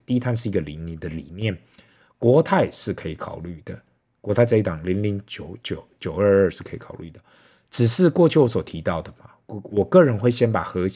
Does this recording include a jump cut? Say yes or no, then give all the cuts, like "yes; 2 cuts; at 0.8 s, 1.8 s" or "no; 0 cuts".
no; 0 cuts